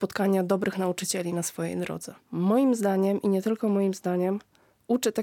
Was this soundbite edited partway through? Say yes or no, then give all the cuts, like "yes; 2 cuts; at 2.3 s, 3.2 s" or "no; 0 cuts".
yes; 1 cut; at 2.2 s